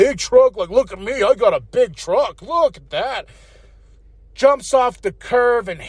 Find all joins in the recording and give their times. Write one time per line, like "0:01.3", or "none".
none